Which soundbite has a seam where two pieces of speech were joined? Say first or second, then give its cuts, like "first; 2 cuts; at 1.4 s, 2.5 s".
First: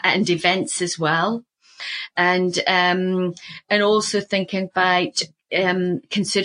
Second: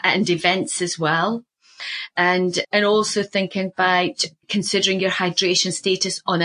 second; 2 cuts; at 2.6 s, 4.4 s